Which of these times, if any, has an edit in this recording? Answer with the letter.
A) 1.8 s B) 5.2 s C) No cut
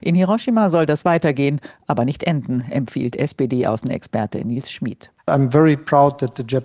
B